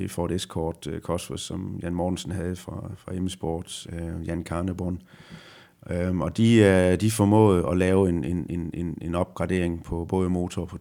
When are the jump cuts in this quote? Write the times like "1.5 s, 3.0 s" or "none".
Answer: 3.8 s